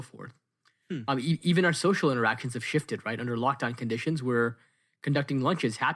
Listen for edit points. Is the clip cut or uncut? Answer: uncut